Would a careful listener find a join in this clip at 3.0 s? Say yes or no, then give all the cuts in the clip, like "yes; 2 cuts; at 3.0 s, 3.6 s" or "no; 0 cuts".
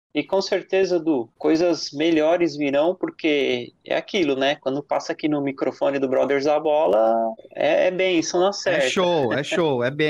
no; 0 cuts